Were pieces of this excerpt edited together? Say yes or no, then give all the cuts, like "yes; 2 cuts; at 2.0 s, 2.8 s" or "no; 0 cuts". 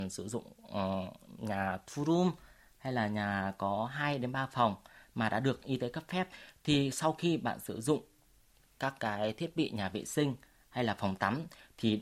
no; 0 cuts